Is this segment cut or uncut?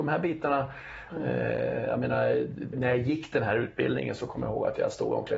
cut